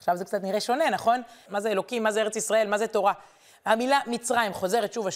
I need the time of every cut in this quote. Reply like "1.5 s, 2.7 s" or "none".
1.5 s